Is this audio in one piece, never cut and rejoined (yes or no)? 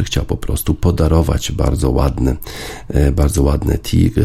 yes